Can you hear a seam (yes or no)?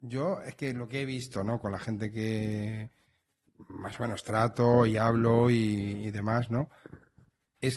no